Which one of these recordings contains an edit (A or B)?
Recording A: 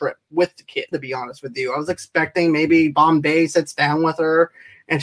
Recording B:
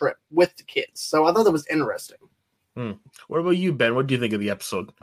A